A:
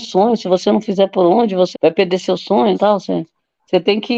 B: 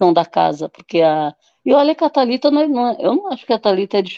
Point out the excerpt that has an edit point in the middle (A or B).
A